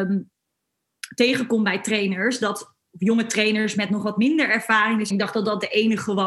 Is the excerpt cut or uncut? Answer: cut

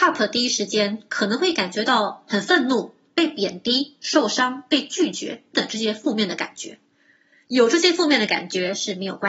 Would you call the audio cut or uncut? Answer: cut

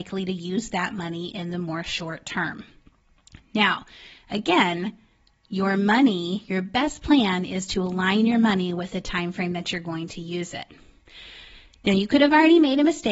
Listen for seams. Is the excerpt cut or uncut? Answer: uncut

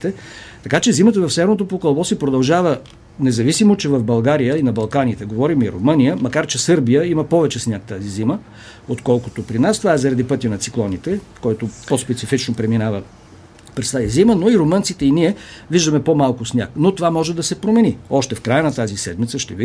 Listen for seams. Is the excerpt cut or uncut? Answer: uncut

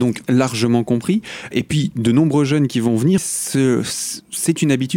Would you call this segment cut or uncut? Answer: cut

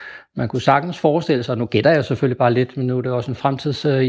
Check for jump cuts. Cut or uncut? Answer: uncut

